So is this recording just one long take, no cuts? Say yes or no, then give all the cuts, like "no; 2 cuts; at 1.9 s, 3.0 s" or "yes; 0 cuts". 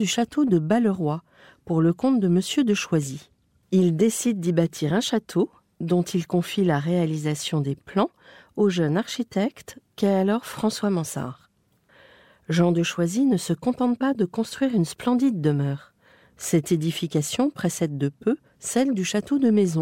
no; 2 cuts; at 3.6 s, 16.2 s